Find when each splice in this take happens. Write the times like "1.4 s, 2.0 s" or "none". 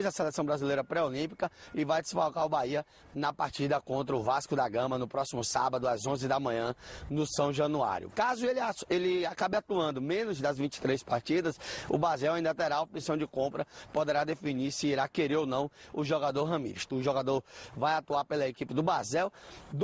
8.1 s, 16.9 s

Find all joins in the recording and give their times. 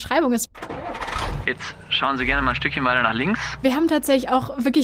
1.4 s, 3.6 s

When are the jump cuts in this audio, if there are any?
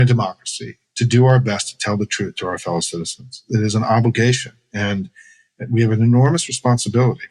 none

